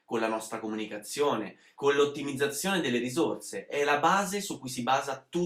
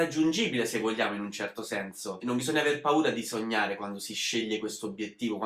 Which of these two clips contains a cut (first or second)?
first